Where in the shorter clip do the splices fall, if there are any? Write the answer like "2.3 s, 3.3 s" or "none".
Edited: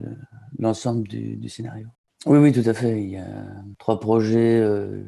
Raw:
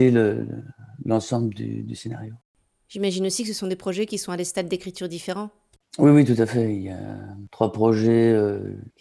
2.0 s

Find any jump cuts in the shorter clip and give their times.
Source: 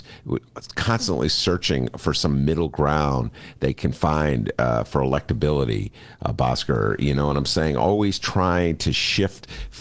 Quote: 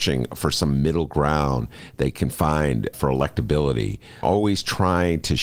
2.9 s, 4.2 s

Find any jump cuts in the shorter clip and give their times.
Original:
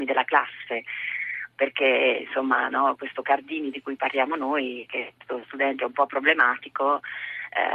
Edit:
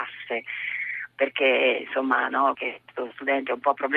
2.5 s

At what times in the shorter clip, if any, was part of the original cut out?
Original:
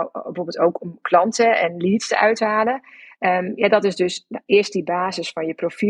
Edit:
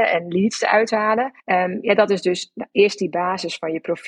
1.4 s

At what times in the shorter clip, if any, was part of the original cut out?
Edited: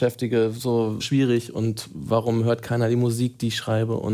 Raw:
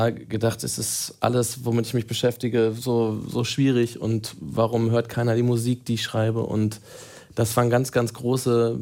1.0 s

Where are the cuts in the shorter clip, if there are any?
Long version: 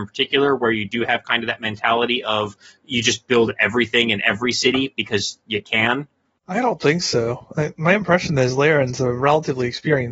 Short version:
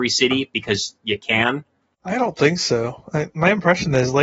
none

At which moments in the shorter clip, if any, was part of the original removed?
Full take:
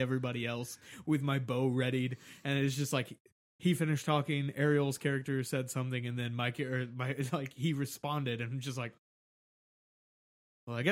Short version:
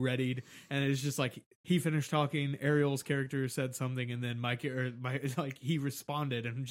1.5 s

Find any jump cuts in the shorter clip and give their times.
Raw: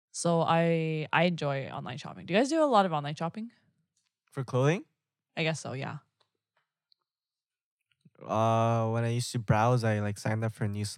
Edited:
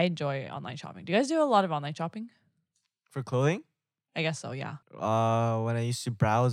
4.8 s

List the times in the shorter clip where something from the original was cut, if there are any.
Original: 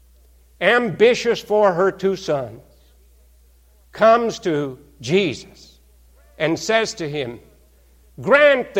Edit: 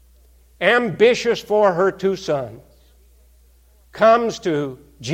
none

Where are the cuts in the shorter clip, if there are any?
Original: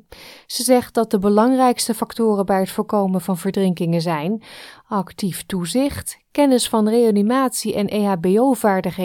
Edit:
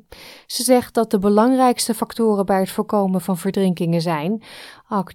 none

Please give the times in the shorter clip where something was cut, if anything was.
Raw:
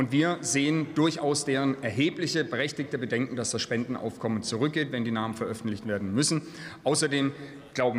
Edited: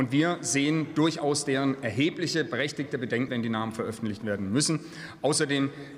3.3 s

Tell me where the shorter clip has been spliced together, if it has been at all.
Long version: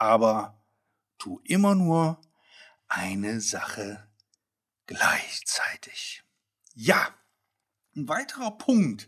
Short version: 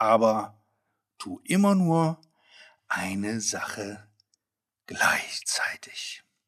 none

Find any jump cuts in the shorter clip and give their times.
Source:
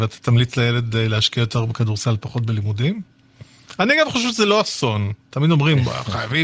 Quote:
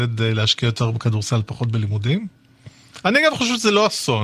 none

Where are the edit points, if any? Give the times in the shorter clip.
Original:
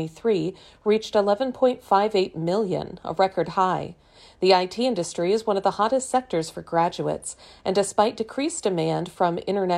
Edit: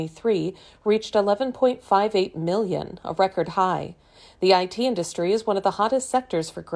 none

